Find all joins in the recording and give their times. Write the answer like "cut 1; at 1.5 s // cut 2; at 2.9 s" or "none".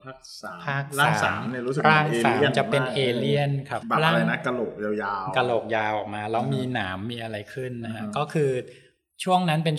cut 1; at 3.8 s